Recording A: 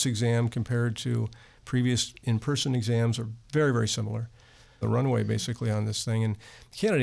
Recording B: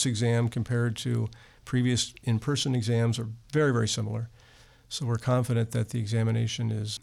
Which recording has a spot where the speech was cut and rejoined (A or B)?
A